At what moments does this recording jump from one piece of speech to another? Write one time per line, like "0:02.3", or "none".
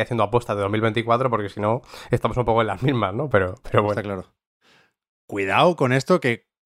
none